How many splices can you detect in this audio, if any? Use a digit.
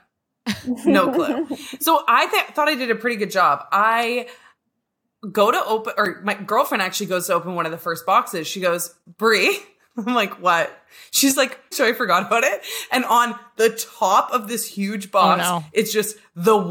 1